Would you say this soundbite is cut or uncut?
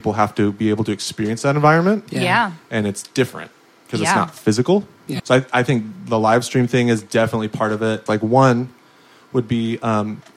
cut